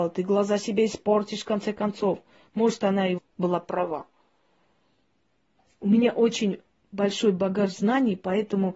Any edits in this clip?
yes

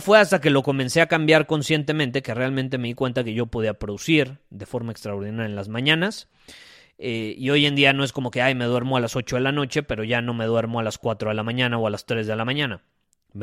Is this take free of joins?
yes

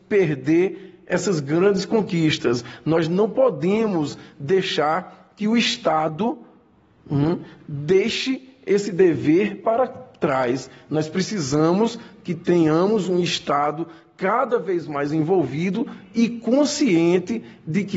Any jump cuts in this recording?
no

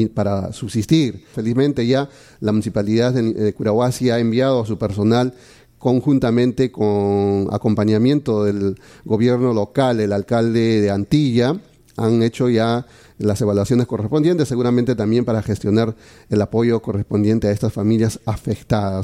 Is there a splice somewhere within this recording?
yes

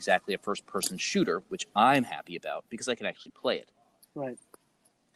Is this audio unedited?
no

